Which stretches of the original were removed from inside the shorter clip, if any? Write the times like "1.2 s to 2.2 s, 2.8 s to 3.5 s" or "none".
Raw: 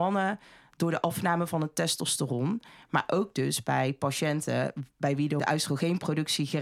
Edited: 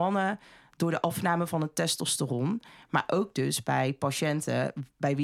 none